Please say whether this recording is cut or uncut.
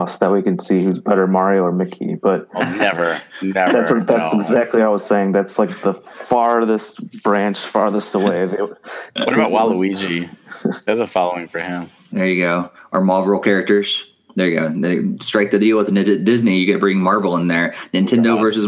uncut